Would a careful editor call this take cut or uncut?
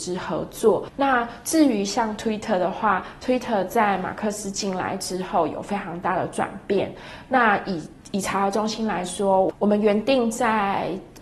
uncut